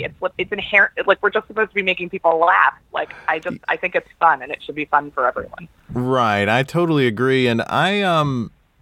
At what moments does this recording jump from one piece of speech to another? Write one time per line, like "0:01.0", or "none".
0:02.9